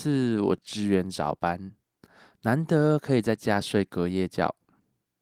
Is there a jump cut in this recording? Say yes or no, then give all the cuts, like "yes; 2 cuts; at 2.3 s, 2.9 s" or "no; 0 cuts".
no; 0 cuts